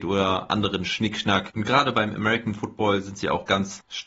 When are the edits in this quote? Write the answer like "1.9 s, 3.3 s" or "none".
none